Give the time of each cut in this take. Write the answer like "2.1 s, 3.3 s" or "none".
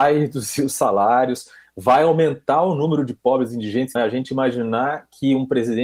4.0 s